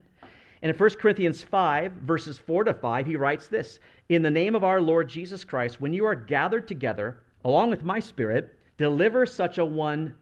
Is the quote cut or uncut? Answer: cut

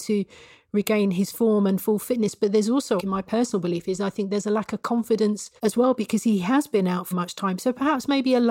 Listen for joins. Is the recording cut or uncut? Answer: cut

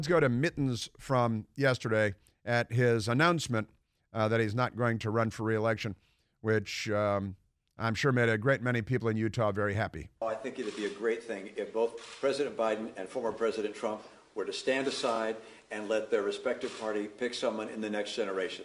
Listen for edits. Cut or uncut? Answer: uncut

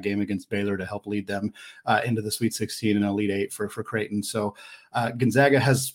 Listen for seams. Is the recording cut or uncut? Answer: uncut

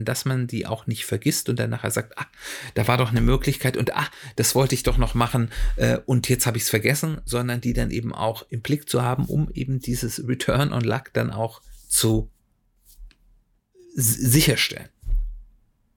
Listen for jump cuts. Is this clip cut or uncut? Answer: uncut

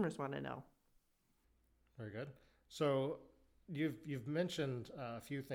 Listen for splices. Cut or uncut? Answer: uncut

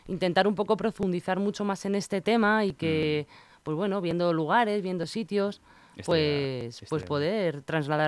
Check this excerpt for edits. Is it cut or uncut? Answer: uncut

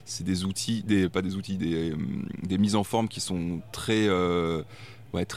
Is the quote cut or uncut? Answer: uncut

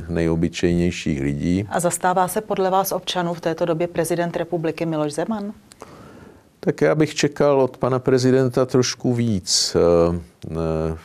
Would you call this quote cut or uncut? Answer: uncut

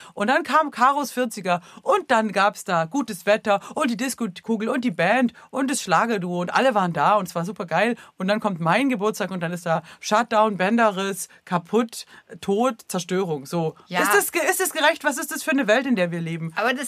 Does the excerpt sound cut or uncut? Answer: uncut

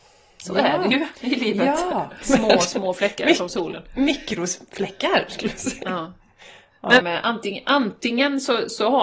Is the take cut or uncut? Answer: cut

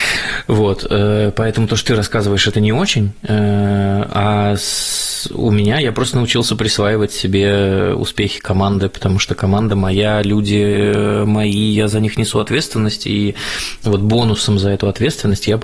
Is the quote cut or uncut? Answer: uncut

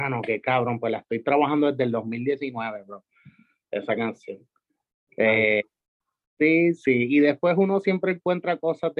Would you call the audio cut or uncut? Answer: uncut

